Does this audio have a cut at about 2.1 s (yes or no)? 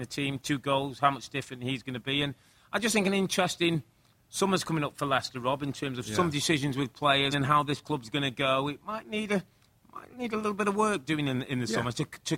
no